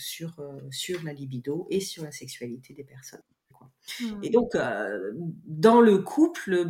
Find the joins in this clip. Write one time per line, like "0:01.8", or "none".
0:03.5